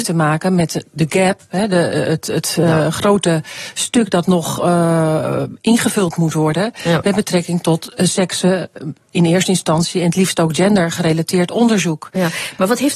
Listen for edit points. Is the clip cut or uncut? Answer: uncut